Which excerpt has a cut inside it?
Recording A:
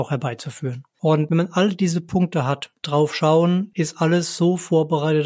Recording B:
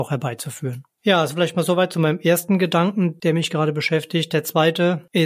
A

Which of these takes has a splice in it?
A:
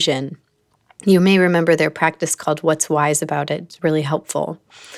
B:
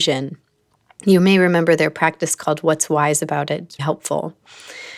B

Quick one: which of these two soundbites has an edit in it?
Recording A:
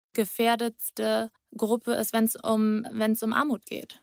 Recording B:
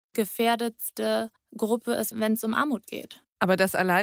B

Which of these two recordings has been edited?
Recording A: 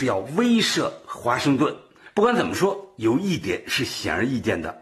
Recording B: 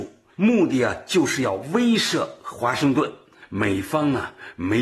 A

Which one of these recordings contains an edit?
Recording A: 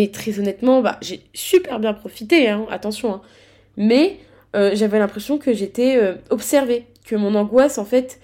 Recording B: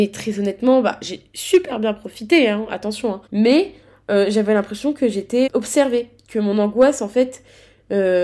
B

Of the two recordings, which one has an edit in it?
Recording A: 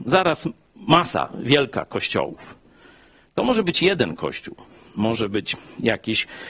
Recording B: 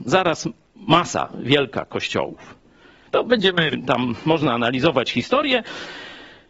B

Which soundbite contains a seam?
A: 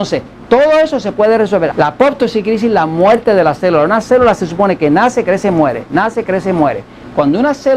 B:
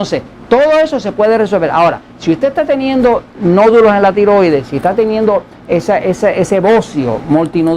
A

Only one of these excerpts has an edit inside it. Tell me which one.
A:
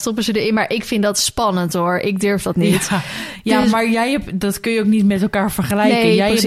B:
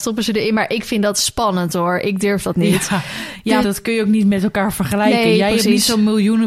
B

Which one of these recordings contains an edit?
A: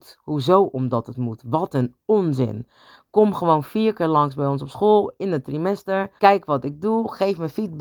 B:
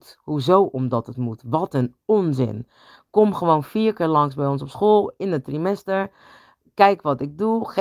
A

